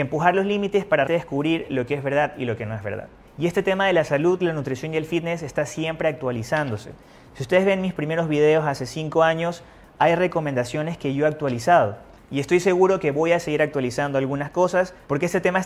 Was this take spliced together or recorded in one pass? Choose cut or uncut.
cut